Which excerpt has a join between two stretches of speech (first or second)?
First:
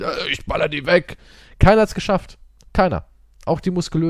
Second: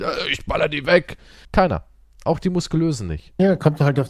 second